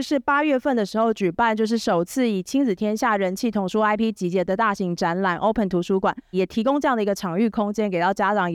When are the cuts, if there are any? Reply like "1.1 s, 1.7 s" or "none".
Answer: 6.3 s